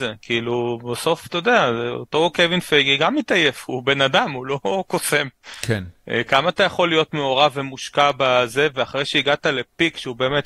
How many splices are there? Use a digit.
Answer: 0